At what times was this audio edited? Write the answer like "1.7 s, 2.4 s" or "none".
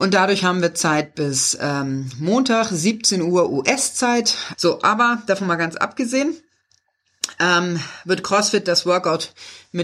4.5 s